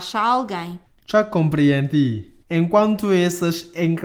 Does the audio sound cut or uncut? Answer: uncut